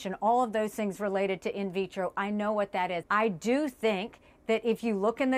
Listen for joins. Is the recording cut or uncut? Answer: cut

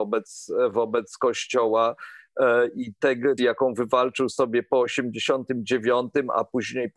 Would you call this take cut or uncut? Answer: cut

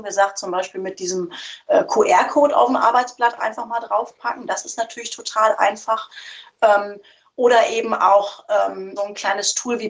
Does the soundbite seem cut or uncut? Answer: cut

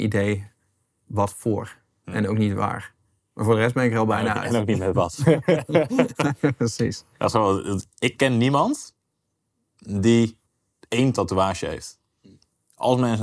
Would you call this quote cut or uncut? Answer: uncut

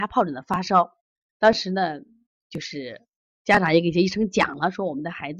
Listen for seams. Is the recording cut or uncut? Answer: uncut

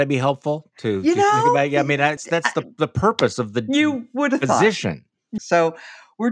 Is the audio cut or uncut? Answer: cut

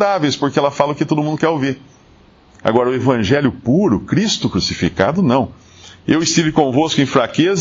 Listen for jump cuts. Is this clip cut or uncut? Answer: uncut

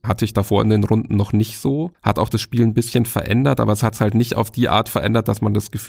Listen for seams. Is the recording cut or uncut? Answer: uncut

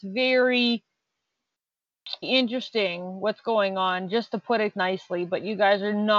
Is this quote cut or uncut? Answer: cut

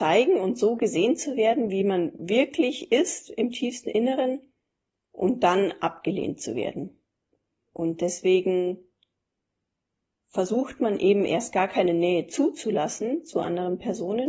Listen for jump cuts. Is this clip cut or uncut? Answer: uncut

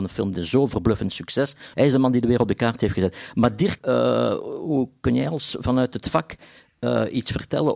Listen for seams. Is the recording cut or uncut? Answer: cut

